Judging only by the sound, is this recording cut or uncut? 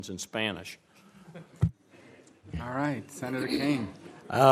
uncut